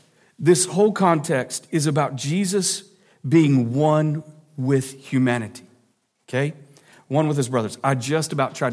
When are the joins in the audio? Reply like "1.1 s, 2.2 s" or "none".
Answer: none